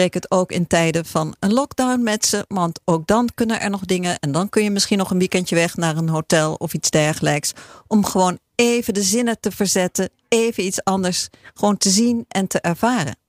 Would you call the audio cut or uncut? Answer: uncut